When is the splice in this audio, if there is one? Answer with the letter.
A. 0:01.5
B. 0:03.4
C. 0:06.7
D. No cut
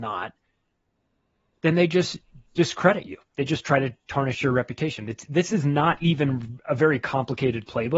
D